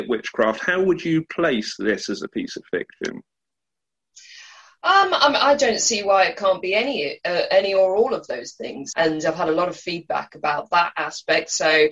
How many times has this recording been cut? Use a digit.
1